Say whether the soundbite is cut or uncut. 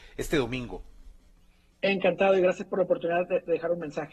uncut